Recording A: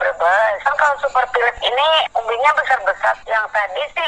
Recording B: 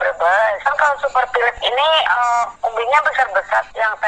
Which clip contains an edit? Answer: A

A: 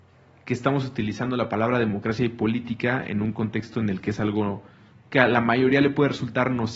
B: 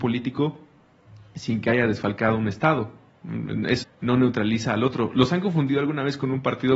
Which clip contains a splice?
B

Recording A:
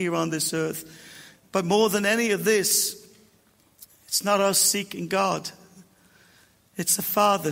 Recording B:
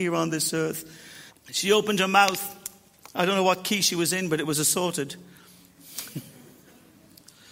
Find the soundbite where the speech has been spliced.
B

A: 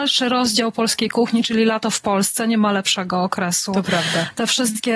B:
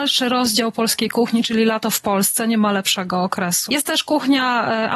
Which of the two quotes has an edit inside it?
B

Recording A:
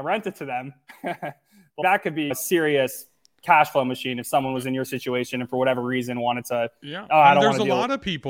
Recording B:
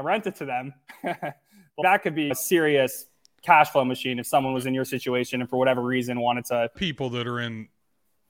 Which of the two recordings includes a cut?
B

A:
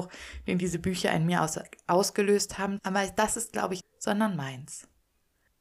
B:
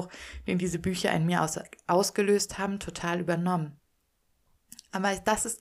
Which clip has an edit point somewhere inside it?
A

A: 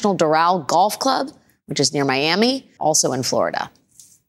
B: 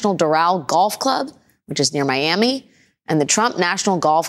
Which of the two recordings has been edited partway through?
A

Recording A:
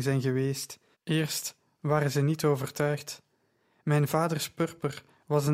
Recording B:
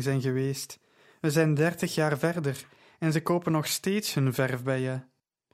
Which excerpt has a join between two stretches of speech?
A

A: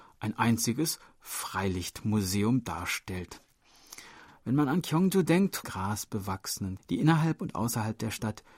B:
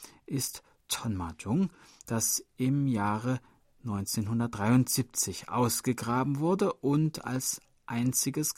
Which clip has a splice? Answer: A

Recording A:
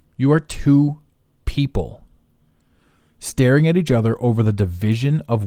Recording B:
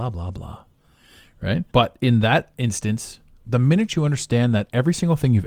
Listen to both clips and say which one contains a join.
B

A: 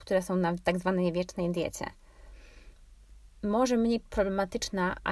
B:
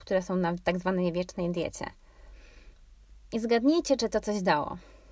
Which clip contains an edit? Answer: B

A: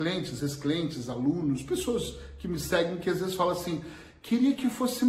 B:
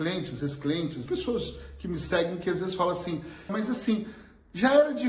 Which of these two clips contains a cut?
B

